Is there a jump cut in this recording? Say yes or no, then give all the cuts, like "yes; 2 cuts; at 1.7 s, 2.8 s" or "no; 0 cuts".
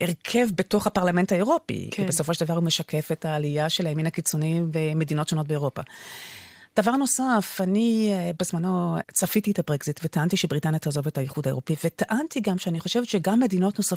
no; 0 cuts